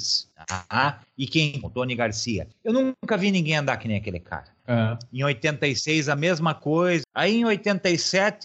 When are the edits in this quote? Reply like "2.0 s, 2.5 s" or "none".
1.6 s, 4.6 s